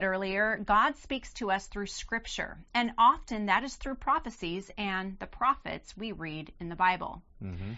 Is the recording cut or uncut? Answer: uncut